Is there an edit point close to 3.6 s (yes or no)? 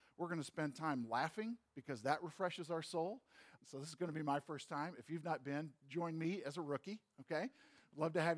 yes